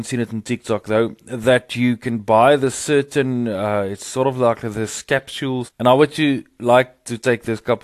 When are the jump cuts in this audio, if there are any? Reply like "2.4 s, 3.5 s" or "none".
5.7 s

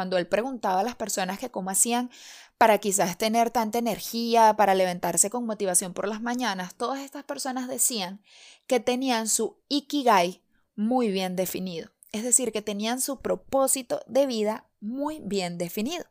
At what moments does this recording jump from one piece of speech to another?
none

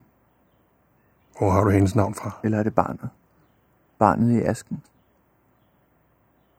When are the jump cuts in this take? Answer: none

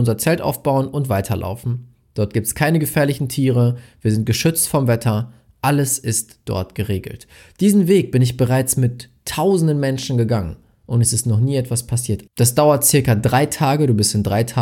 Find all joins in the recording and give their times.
12.3 s

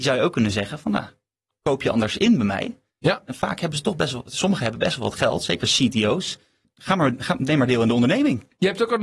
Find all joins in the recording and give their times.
none

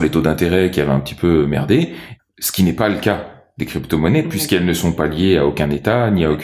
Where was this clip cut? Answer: 2.2 s

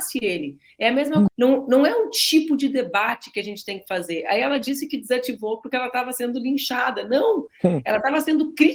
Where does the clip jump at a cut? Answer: 1.3 s

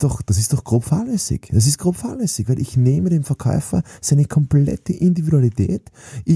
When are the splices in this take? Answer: none

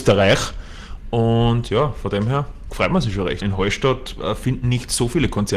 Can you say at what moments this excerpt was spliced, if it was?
3.4 s

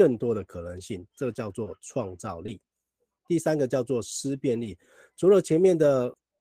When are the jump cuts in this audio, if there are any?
3.2 s

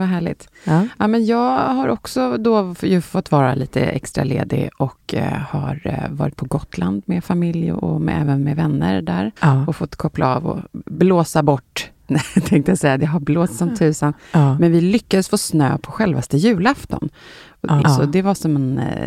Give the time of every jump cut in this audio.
9.4 s, 17.8 s

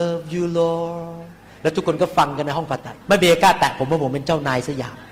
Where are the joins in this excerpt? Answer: 3.0 s

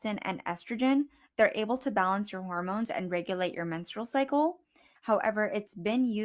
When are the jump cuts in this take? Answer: 5.0 s

